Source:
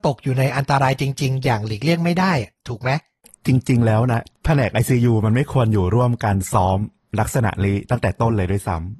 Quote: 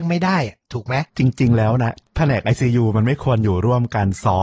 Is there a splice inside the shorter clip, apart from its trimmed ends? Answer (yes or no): yes